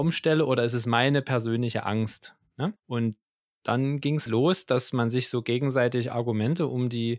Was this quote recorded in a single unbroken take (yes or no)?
no